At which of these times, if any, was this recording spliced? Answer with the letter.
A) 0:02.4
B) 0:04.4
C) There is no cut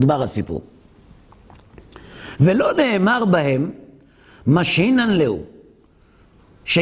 C